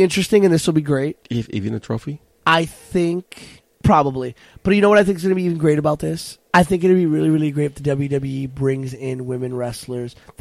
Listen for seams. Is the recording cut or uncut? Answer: uncut